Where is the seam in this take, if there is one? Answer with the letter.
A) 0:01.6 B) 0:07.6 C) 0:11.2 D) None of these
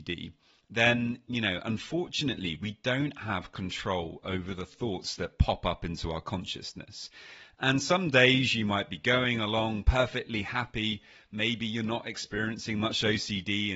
D